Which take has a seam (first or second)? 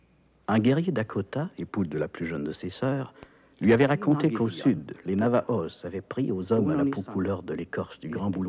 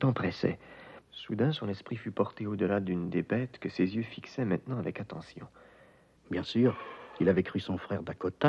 second